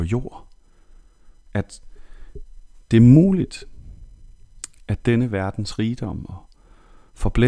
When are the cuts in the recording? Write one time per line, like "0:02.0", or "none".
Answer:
none